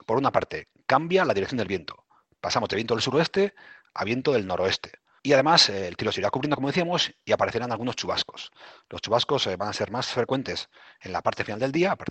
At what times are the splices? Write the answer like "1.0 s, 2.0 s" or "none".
5.2 s